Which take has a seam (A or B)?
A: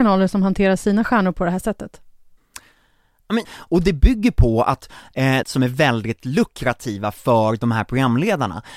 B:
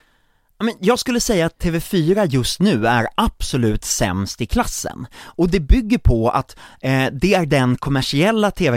A